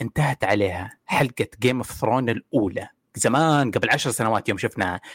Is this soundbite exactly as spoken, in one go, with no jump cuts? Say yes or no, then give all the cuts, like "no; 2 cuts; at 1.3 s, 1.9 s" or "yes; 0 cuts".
yes; 0 cuts